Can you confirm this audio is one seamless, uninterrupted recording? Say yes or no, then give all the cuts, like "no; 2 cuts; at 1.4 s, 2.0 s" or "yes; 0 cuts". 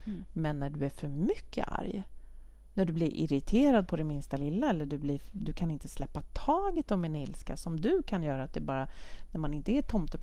yes; 0 cuts